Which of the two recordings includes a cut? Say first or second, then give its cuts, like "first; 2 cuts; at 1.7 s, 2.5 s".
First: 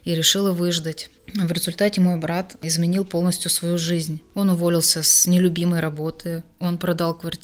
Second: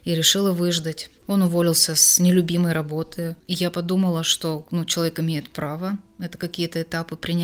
second; 2 cuts; at 1.2 s, 3.4 s